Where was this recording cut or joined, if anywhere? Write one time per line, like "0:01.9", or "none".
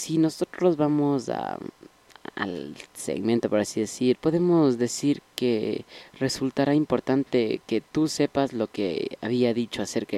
0:04.2

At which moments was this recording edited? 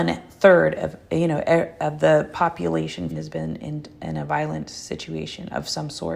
0:03.1

